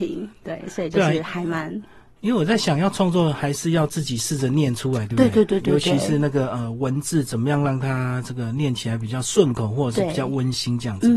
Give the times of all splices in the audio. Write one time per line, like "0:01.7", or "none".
none

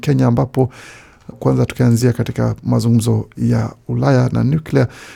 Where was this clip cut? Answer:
0:01.3

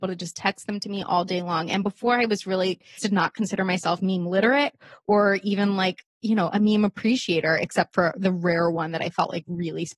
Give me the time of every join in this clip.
0:03.0

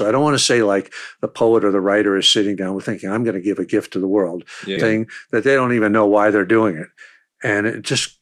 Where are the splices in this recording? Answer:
0:04.8

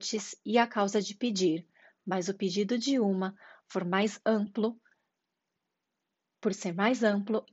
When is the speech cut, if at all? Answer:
none

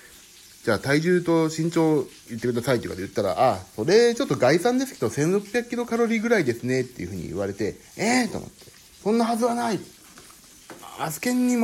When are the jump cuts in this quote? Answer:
0:02.3
0:07.8

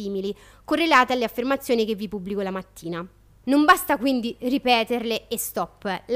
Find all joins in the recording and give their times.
0:03.4

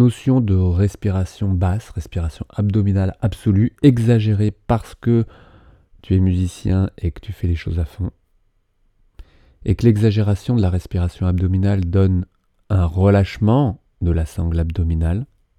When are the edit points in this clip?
none

